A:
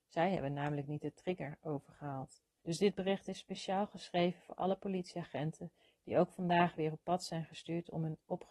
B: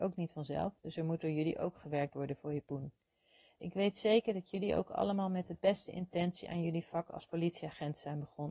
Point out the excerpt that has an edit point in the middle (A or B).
A